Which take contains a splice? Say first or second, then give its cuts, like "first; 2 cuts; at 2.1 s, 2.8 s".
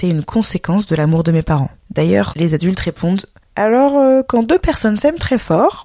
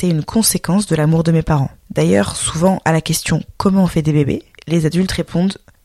first; 1 cut; at 2.3 s